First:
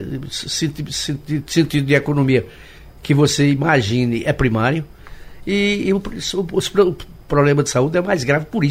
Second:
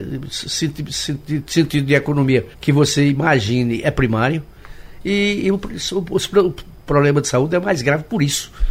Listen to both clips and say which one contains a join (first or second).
second